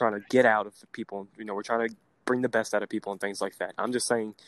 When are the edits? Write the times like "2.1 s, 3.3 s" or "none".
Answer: none